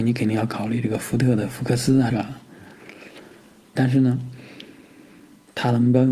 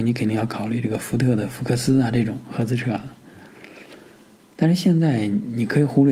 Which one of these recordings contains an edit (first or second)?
first